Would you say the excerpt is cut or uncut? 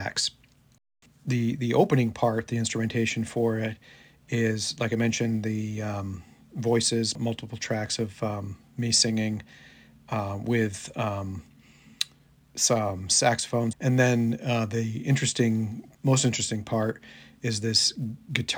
cut